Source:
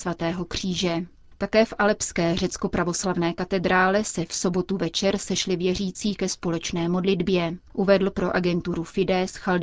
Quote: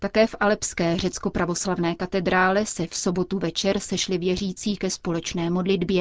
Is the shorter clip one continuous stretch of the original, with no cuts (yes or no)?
yes